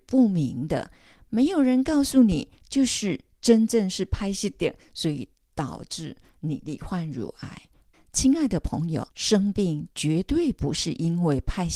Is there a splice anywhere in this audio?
yes; 2 cuts; at 7.9 s, 9.1 s

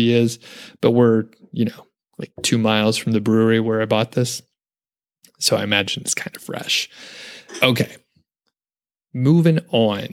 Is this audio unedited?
yes; 0 cuts

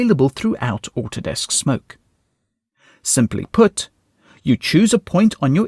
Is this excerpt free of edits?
yes; 0 cuts

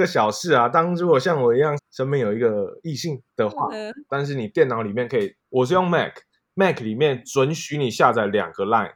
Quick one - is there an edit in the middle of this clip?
yes; 3 cuts; at 1.8 s, 4.1 s, 5.4 s

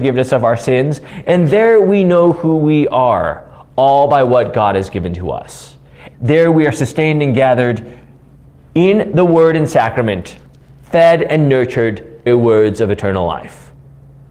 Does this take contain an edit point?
yes; 2 cuts; at 6.1 s, 12.3 s

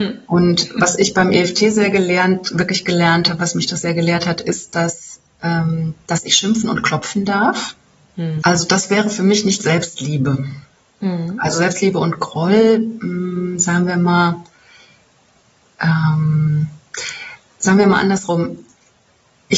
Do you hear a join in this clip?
yes; 1 cut; at 8.4 s

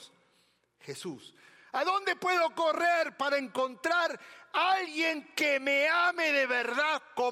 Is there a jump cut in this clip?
no; 0 cuts

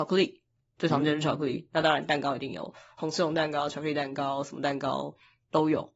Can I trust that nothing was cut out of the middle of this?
yes; 0 cuts

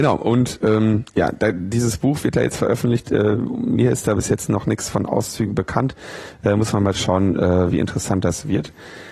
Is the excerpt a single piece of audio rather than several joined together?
yes; 0 cuts

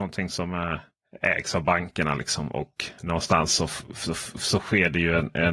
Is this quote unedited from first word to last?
yes; 0 cuts

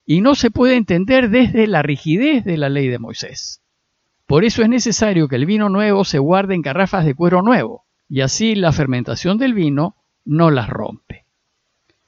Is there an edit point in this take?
yes; 2 cuts; at 4.2 s, 8.0 s

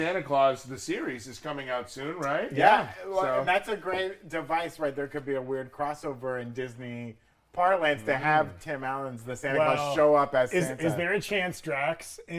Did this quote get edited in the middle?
no; 0 cuts

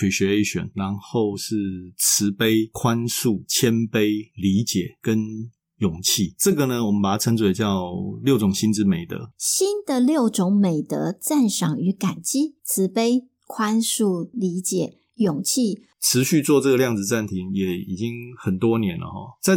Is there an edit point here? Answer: yes; 2 cuts; at 14.3 s, 15.9 s

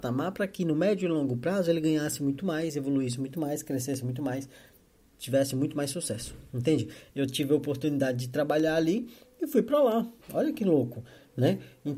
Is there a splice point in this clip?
yes; 2 cuts; at 7.1 s, 10.2 s

